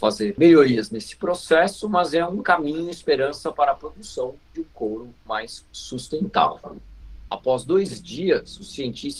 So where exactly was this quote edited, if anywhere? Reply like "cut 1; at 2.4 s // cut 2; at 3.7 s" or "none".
cut 1; at 7.3 s